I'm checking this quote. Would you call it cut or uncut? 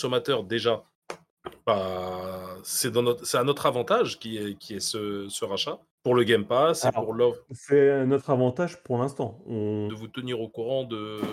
cut